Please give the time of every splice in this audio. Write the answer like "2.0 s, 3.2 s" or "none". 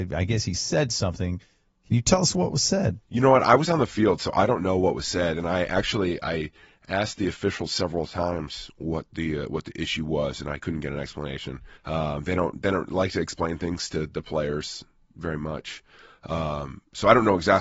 11.8 s